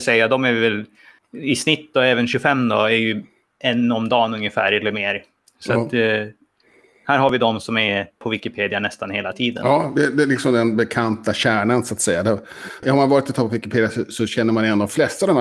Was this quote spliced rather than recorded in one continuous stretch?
no; 0 cuts

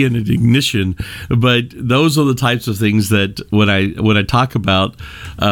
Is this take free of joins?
no; 1 cut; at 1.3 s

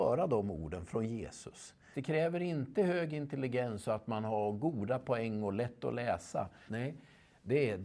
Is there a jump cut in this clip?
yes; 2 cuts; at 1.9 s, 6.7 s

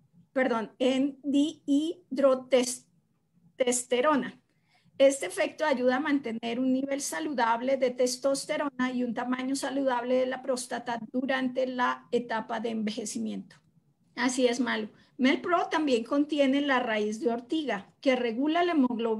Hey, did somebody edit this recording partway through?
yes; 1 cut; at 14.0 s

